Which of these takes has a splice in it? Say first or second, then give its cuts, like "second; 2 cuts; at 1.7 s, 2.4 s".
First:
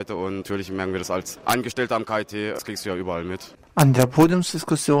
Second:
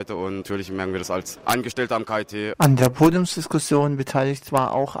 second; 1 cut; at 2.5 s